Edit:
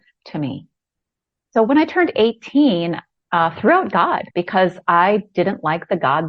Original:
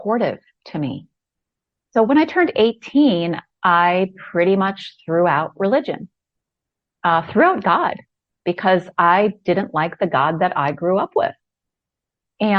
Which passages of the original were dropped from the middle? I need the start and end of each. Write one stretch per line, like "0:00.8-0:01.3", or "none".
0:03.6-0:06.9
0:08.0-0:08.4